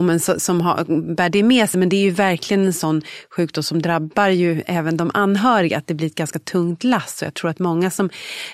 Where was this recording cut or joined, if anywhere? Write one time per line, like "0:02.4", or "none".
none

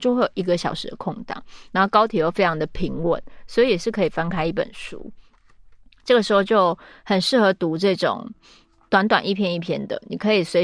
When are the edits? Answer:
none

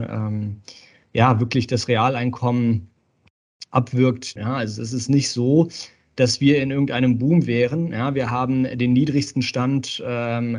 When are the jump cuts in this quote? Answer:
0:04.4

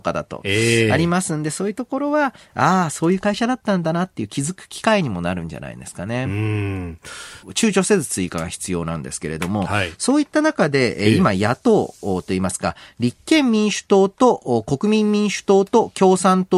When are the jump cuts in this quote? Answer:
0:07.4

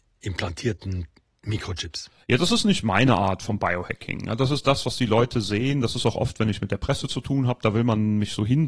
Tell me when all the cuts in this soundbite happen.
none

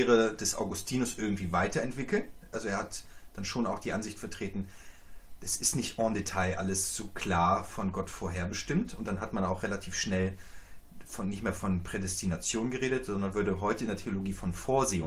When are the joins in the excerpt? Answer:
none

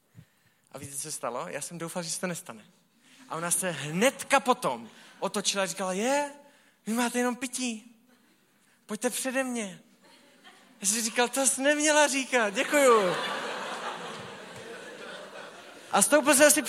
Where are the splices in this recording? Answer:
none

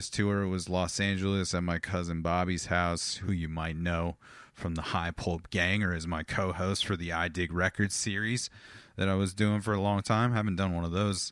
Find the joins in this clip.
none

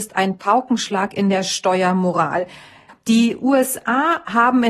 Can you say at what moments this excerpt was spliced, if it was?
0:02.9

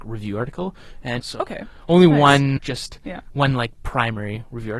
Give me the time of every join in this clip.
0:01.2
0:02.6

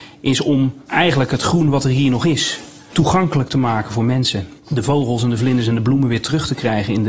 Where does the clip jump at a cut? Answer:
0:04.6

